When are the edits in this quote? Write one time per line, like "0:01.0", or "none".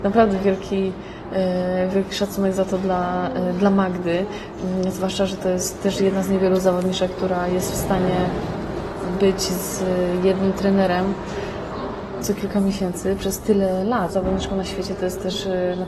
0:12.2
0:14.1